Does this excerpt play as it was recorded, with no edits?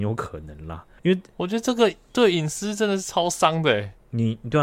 no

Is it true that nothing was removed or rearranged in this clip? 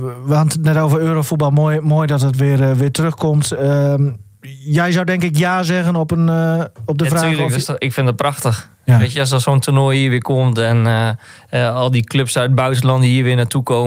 yes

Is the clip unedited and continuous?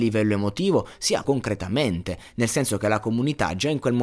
no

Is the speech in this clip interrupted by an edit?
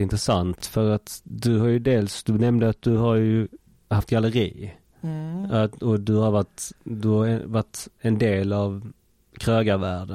no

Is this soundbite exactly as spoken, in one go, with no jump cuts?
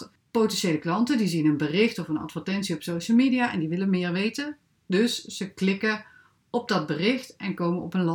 yes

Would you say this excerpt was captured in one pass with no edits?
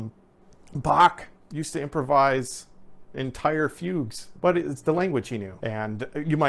no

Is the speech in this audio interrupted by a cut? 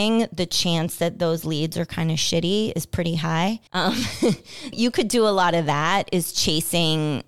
yes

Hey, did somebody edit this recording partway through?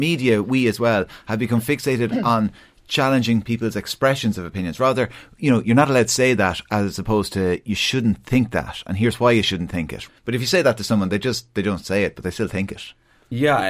yes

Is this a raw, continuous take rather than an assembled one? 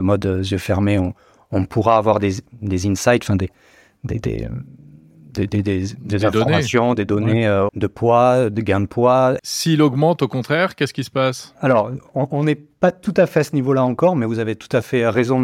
no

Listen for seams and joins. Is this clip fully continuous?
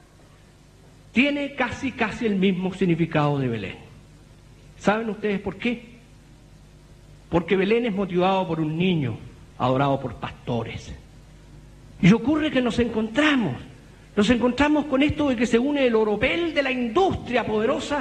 no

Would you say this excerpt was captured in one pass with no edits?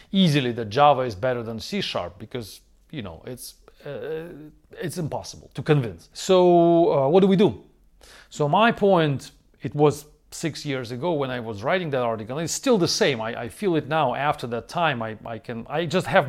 yes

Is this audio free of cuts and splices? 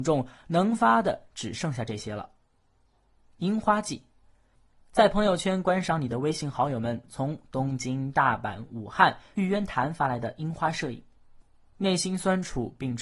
yes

